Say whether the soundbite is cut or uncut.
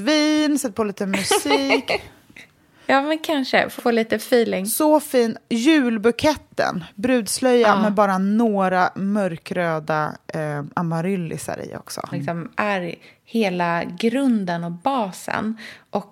cut